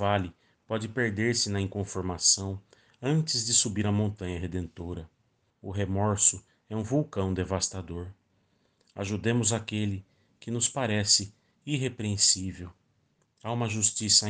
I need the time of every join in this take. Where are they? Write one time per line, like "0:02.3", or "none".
0:05.5